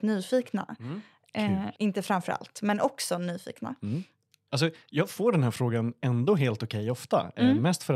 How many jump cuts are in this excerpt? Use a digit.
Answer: 2